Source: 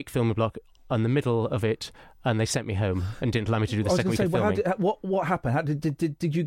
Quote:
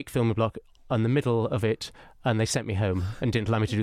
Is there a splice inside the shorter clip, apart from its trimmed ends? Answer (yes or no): no